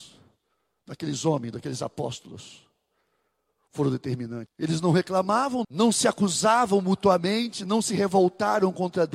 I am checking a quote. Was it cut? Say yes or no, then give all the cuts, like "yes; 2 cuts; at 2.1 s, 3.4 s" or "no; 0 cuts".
yes; 2 cuts; at 4.5 s, 5.6 s